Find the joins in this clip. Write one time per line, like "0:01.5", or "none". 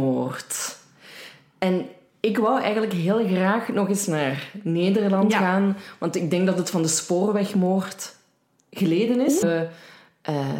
0:09.4

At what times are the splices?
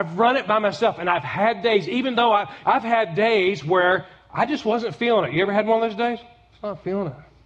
0:02.6

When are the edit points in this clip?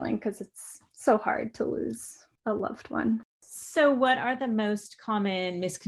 0:03.3

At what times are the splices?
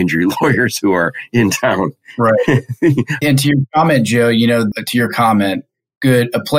0:04.7

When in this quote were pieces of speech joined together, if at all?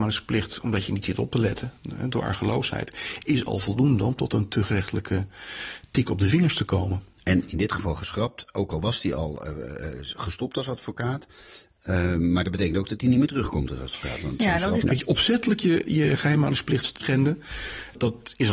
0:14.8

